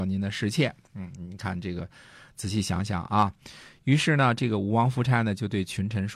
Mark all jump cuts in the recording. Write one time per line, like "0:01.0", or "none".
none

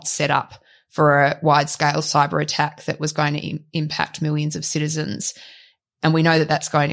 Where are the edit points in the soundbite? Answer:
none

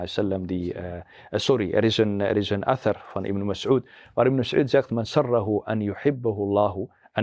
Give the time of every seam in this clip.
none

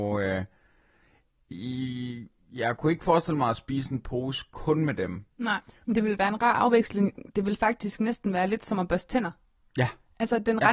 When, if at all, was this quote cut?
0:05.8

